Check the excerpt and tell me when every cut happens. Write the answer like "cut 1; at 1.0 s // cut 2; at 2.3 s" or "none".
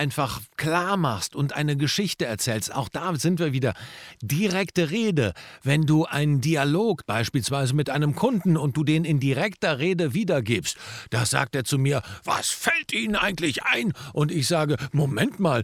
cut 1; at 7.0 s